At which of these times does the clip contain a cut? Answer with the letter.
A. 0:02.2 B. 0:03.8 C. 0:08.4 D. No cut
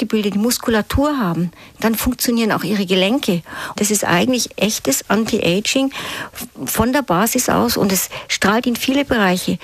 B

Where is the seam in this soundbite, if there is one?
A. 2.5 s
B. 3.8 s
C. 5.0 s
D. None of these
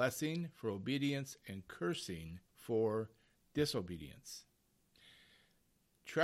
A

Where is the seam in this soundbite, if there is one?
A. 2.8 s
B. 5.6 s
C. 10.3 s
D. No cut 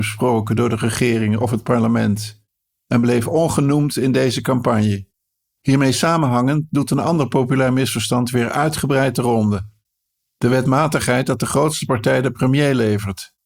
B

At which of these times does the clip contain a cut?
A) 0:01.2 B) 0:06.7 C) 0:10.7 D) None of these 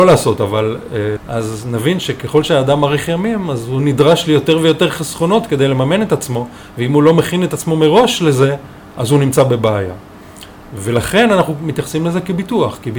A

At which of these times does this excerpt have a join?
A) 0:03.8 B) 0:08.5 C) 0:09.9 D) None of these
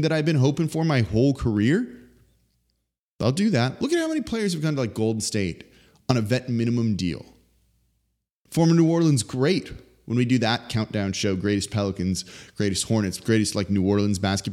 B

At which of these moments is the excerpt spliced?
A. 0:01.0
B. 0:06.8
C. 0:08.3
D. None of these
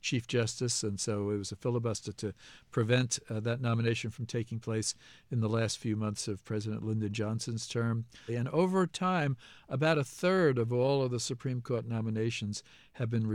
C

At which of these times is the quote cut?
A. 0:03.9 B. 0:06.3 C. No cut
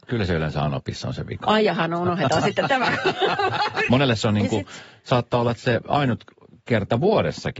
A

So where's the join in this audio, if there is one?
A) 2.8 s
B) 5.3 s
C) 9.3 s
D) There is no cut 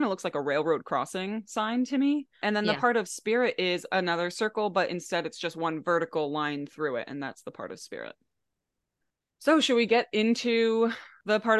D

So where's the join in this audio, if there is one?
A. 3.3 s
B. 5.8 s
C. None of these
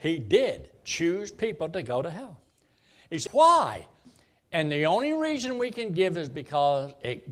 A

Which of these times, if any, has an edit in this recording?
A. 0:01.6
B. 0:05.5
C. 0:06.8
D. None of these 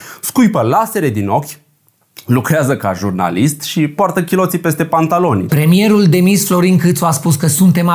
B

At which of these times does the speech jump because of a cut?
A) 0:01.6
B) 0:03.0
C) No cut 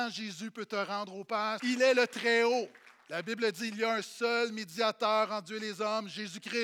A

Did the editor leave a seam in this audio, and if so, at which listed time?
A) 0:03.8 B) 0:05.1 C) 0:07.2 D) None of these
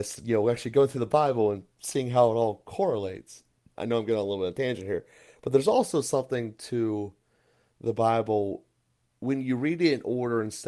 A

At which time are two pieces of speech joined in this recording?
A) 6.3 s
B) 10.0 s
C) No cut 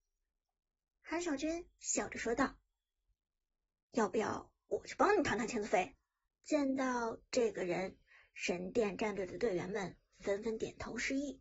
A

